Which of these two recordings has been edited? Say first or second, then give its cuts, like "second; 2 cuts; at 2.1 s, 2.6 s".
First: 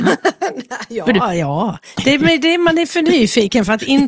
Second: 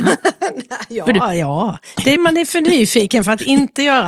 second; 1 cut; at 2.2 s